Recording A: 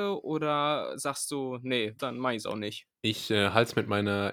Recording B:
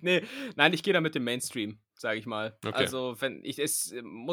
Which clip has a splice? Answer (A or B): A